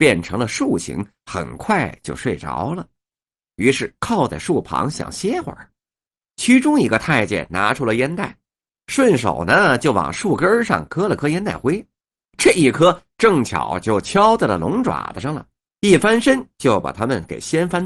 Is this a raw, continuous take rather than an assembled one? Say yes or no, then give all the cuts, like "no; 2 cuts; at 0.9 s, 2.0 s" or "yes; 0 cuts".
no; 2 cuts; at 3.5 s, 15.7 s